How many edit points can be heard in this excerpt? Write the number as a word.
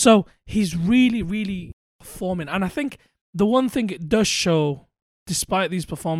zero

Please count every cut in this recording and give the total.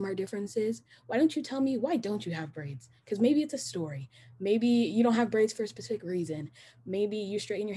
zero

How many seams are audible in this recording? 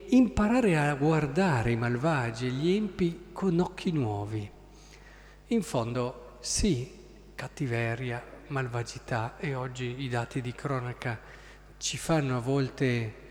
zero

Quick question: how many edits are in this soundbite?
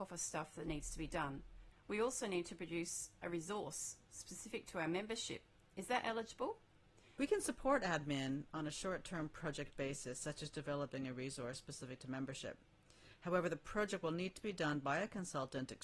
two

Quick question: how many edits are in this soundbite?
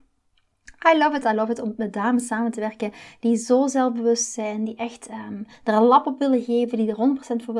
one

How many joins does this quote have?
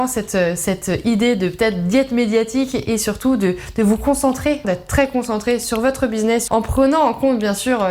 two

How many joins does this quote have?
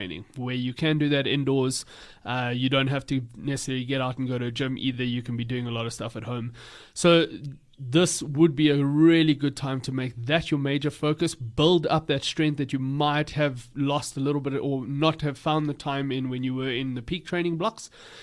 zero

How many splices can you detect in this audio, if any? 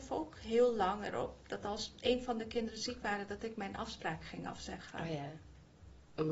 zero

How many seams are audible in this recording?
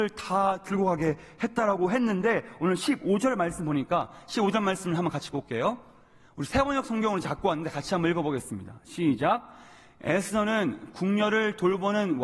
zero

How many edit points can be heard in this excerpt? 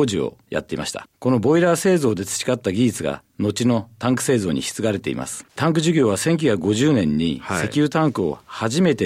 zero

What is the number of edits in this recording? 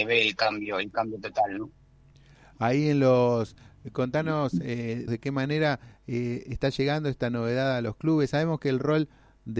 one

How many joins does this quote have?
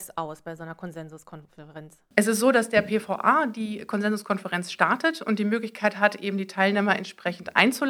one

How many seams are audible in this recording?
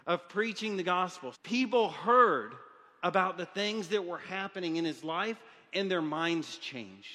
one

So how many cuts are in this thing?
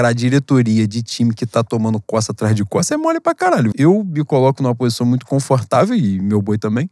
one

